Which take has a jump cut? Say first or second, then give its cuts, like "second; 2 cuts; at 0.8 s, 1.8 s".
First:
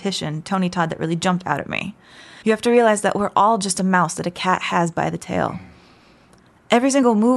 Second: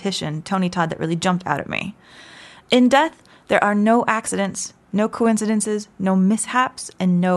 first; 1 cut; at 2.4 s